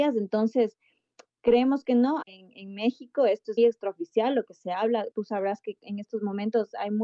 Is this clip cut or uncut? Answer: cut